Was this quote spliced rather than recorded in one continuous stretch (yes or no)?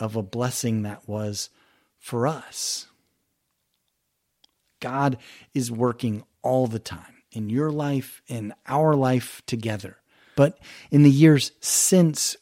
yes